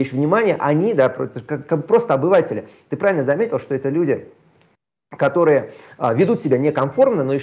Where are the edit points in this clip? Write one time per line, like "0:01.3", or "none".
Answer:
none